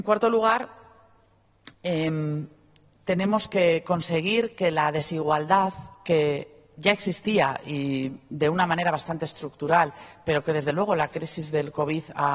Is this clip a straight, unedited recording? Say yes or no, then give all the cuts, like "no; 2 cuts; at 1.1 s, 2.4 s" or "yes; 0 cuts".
yes; 0 cuts